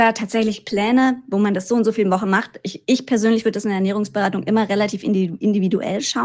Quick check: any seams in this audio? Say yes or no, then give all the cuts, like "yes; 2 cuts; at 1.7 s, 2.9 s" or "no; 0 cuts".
no; 0 cuts